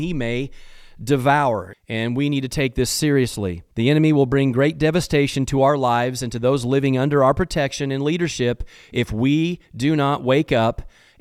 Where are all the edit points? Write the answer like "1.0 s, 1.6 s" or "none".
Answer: 1.7 s, 3.7 s